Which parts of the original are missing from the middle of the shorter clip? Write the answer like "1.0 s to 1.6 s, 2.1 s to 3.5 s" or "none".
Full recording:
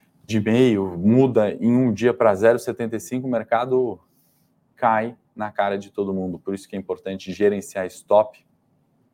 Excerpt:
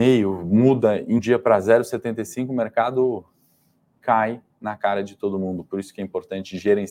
1.7 s to 1.9 s